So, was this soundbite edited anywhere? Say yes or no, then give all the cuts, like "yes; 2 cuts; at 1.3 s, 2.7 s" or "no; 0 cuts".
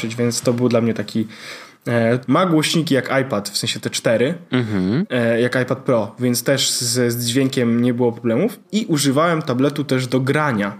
yes; 1 cut; at 2.3 s